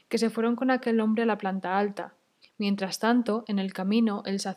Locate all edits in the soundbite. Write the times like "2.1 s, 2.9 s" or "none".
2.4 s

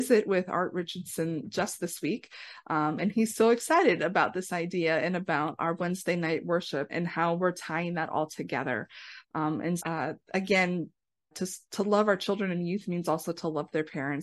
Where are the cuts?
6.9 s, 9.8 s, 11.3 s

